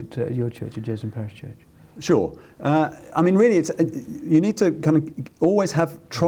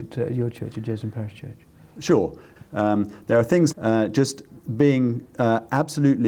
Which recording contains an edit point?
second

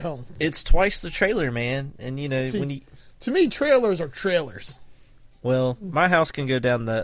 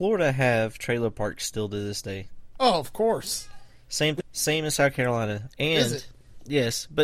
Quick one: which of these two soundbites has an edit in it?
second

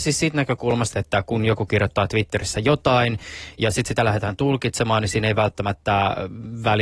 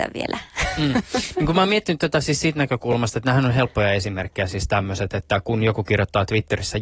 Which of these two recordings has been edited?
first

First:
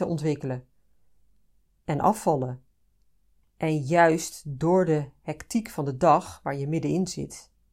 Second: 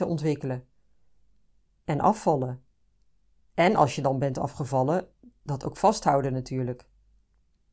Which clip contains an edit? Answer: first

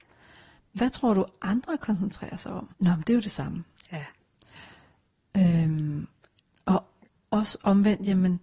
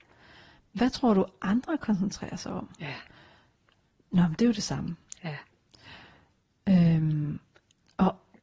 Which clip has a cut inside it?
first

